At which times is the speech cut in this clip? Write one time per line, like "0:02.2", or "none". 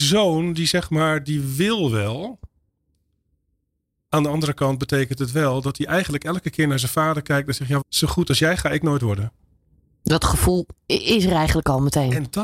0:07.8